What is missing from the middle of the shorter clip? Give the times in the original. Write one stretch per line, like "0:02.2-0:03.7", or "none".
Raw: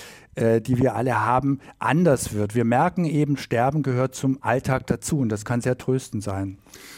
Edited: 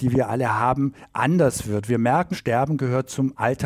0:03.0-0:03.4